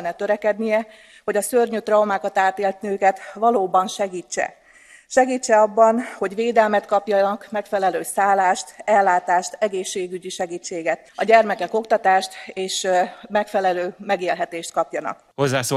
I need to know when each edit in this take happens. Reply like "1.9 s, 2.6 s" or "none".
11.1 s